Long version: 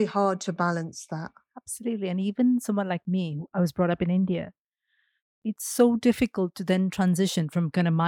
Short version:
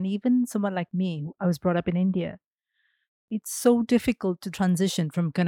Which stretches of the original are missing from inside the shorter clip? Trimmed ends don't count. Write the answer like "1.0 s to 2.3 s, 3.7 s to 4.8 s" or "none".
6.7 s to 6.9 s